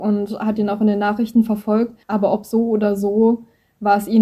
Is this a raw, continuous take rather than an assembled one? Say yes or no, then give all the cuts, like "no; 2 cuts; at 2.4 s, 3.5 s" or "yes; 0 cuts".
no; 1 cut; at 2.0 s